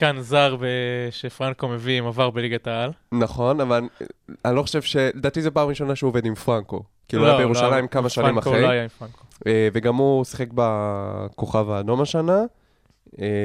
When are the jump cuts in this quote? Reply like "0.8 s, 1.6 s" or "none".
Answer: none